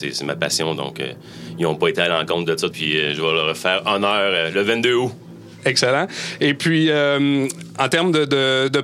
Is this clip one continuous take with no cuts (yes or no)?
no